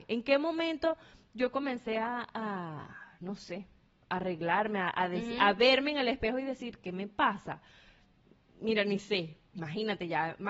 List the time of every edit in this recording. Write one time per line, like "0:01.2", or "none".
0:09.5